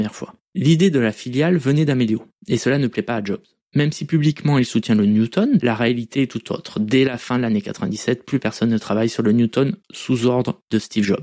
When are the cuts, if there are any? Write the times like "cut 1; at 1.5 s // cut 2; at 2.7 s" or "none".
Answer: cut 1; at 5.6 s